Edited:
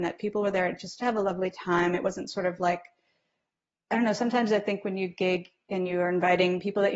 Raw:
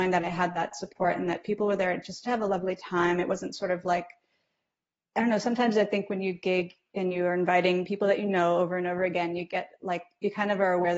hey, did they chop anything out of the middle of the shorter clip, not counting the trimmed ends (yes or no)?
no